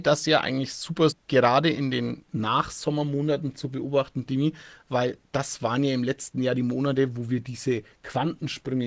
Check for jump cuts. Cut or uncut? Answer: cut